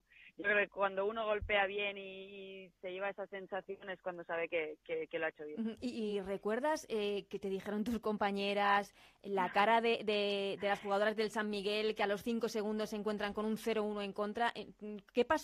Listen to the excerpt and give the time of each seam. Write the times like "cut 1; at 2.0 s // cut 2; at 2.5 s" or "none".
none